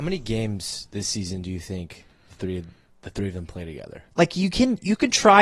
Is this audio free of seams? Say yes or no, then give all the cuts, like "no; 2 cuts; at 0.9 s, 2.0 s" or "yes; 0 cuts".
no; 1 cut; at 4.1 s